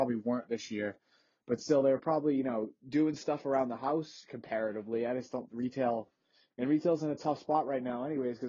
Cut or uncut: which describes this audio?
uncut